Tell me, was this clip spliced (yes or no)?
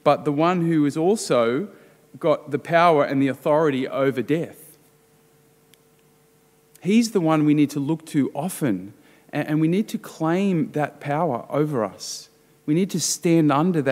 no